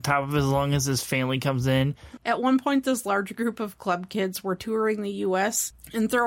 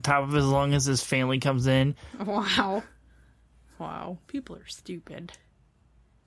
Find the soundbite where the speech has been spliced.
first; 1 cut; at 2.2 s

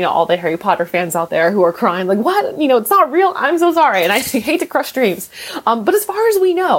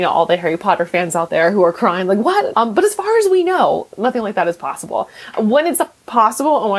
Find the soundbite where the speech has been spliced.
second; 1 cut; at 2.5 s

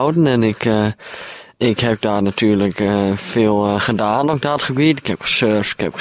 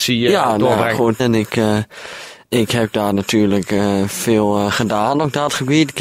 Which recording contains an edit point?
second; 1 cut; at 1.2 s

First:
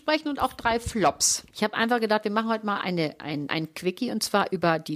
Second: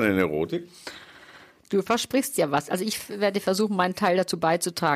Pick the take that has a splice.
first; 2 cuts; at 1.5 s, 3.5 s

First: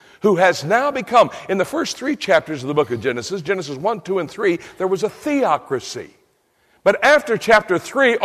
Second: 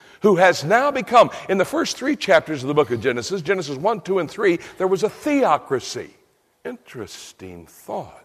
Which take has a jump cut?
second; 1 cut; at 6.5 s

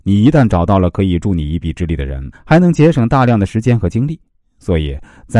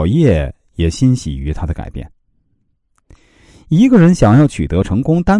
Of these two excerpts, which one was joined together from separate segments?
first; 1 cut; at 2.3 s

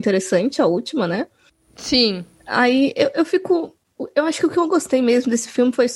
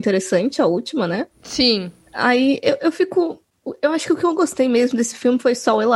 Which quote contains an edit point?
second; 1 cut; at 1.3 s

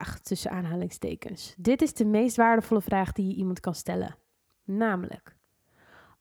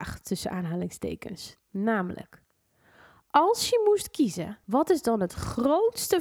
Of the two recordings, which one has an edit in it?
second; 2 cuts; at 1.6 s, 4.6 s

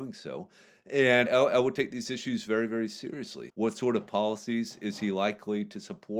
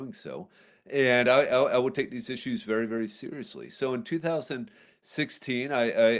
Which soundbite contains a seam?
first; 2 cuts; at 1.3 s, 3.5 s

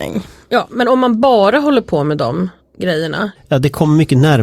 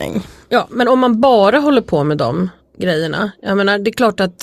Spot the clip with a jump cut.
first; 1 cut; at 3.3 s

